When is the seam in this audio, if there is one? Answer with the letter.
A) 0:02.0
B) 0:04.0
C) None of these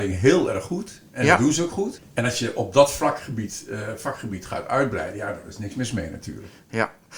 A